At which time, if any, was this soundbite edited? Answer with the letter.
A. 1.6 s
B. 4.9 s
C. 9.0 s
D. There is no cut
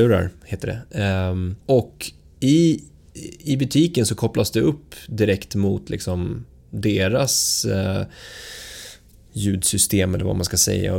A